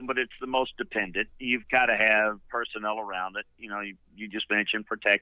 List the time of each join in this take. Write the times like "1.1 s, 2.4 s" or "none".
none